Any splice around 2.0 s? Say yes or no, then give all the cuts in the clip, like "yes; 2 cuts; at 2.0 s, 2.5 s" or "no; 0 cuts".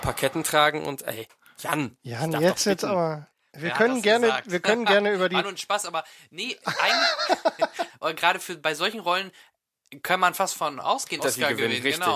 no; 2 cuts; at 7.9 s, 11.2 s